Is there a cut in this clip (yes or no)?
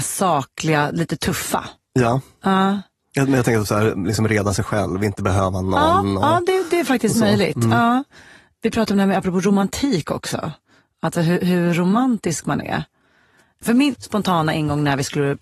no